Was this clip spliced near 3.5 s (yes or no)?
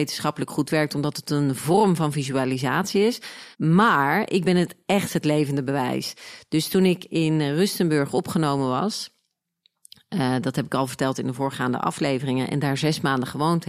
yes